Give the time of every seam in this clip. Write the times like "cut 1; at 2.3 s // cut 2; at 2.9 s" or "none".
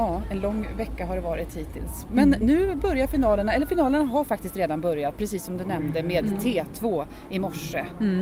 none